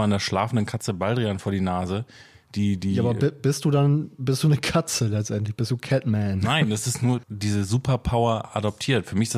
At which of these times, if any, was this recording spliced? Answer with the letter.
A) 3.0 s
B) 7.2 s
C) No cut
B